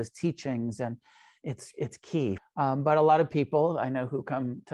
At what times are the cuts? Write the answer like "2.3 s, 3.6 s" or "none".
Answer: 2.4 s